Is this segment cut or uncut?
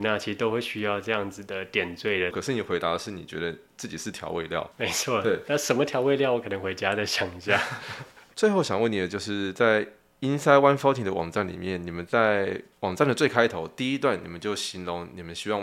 cut